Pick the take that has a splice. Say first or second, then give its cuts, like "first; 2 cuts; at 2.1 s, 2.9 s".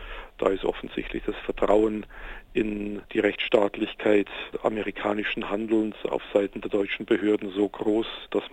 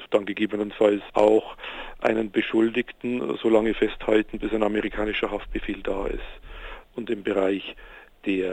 second; 1 cut; at 6.9 s